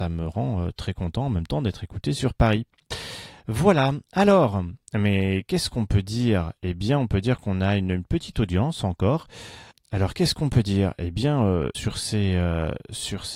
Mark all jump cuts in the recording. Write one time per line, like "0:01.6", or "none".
none